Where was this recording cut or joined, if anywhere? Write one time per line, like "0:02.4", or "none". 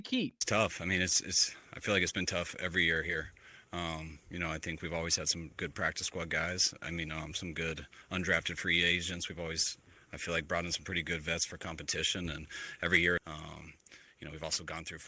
0:13.2